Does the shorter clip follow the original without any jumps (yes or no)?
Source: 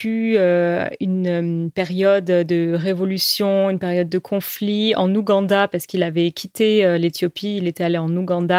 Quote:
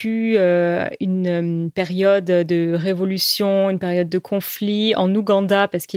yes